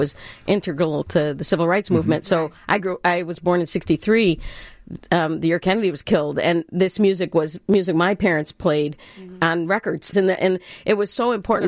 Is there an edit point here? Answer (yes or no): yes